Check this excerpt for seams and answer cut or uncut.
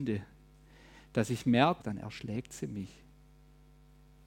cut